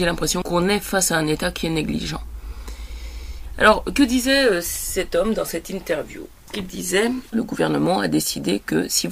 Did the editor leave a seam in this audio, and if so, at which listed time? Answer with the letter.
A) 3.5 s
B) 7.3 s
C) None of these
B